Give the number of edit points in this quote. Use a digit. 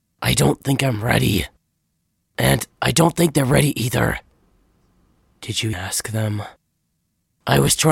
1